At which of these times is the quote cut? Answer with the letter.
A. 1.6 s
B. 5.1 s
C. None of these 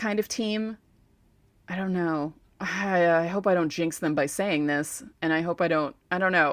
C